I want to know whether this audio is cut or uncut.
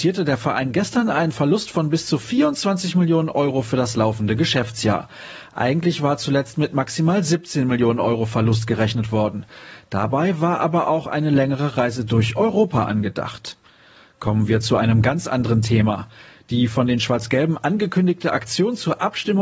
uncut